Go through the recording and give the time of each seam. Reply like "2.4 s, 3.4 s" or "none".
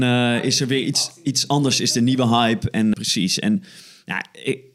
2.9 s